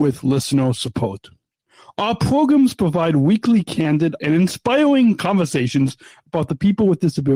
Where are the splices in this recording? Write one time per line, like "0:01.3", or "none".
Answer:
0:04.2